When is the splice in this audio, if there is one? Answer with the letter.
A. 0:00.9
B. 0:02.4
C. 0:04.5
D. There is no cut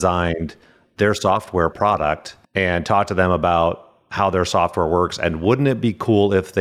B